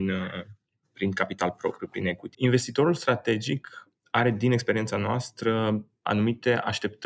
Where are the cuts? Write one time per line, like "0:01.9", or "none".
0:02.3